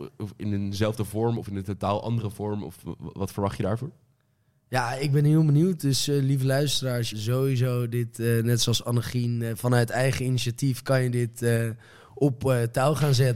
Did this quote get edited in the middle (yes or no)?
yes